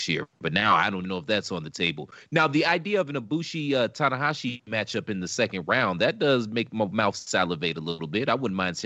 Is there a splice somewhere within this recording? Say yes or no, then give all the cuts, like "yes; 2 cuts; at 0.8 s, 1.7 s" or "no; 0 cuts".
yes; 1 cut; at 1.0 s